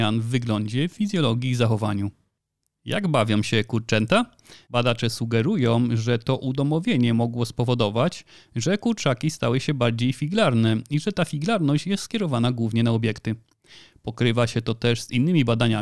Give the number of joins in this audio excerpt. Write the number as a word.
two